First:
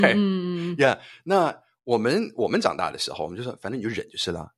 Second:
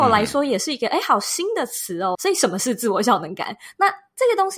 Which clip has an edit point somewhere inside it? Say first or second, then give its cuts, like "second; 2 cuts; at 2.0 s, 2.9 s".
second; 1 cut; at 2.1 s